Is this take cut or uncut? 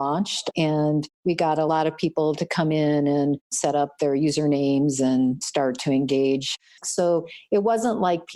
cut